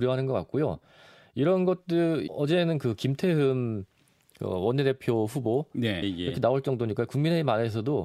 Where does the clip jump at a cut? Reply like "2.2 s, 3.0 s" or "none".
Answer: 2.3 s, 6.0 s